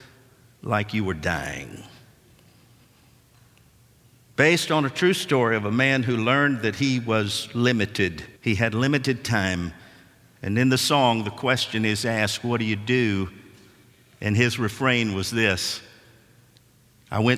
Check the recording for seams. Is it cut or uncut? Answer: cut